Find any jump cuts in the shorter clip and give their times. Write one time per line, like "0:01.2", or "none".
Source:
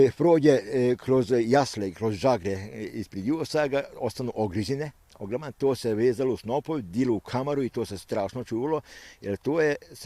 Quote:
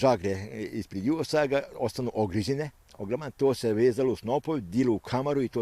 none